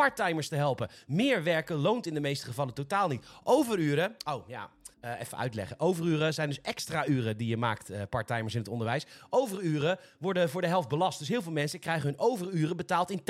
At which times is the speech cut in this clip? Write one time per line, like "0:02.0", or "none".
0:04.9